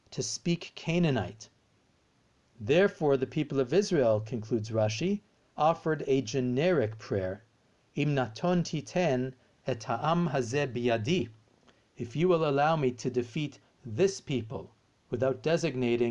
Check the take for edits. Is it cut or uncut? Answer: cut